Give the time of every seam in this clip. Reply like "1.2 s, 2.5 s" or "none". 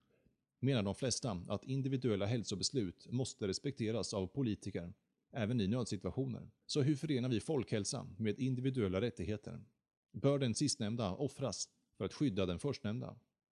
6.6 s